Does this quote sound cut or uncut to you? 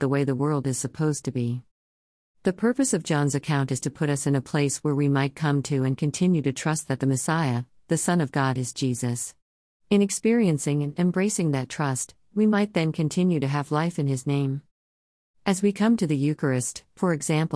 uncut